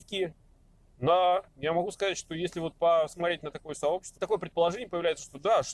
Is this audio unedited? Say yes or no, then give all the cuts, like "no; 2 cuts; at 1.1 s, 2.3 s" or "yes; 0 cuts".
no; 2 cuts; at 0.9 s, 4.2 s